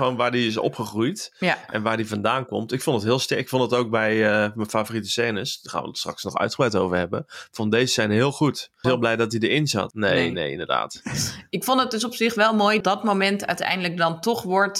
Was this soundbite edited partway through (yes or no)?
yes